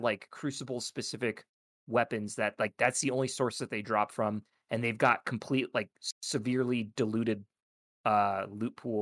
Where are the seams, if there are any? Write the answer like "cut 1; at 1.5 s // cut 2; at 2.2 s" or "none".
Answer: none